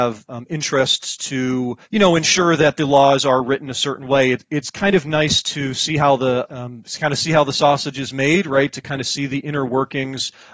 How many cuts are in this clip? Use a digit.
2